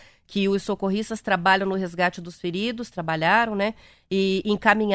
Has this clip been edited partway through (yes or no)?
no